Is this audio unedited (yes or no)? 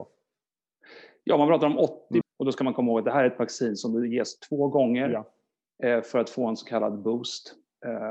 no